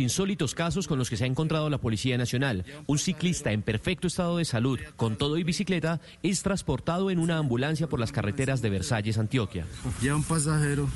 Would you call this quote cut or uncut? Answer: uncut